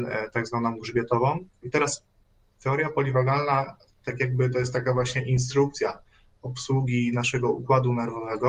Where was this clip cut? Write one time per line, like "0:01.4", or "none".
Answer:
0:01.6